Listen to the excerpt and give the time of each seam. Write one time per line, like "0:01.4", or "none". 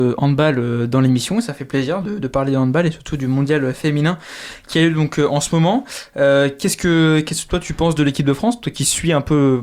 0:02.0